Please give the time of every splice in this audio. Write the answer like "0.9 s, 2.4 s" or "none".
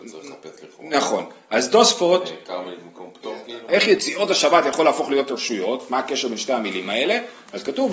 3.7 s